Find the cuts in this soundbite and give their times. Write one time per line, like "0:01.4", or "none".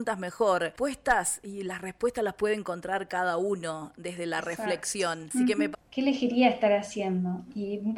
0:05.7